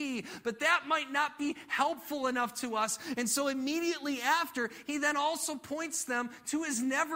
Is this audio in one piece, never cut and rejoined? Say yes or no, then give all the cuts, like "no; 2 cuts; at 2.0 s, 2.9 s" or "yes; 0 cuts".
yes; 0 cuts